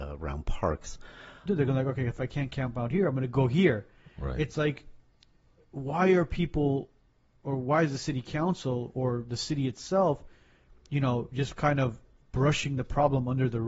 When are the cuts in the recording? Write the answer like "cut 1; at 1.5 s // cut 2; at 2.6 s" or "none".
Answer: cut 1; at 1.5 s